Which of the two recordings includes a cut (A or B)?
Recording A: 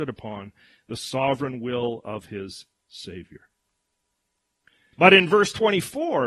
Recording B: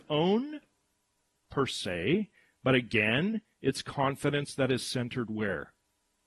A